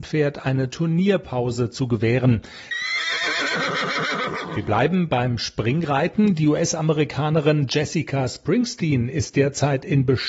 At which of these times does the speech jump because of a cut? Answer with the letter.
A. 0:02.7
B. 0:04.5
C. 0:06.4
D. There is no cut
A